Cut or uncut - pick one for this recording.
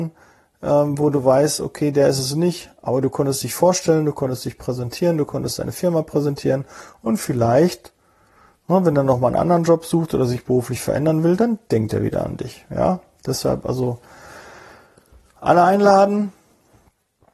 uncut